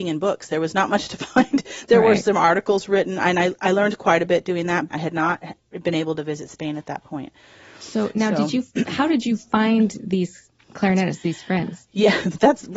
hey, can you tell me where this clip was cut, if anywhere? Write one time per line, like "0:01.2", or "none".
0:04.9